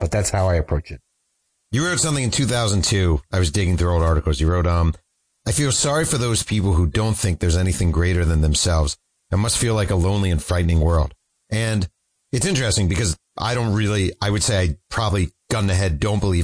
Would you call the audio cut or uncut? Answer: uncut